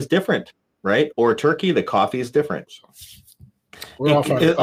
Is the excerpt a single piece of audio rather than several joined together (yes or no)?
no